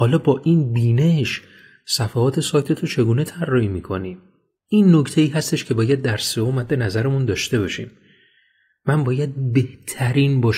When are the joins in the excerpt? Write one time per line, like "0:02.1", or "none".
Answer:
0:04.7